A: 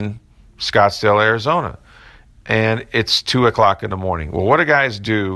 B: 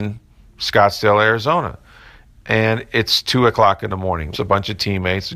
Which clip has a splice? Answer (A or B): B